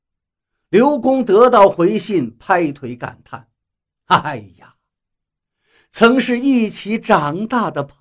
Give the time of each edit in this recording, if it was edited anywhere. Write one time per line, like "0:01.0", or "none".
none